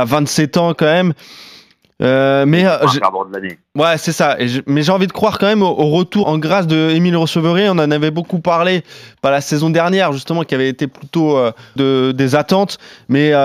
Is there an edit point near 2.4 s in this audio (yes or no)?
no